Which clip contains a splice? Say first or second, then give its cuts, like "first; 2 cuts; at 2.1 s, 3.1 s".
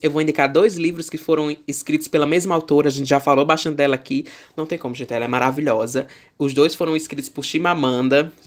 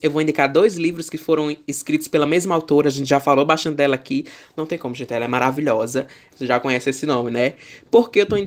second; 1 cut; at 6.3 s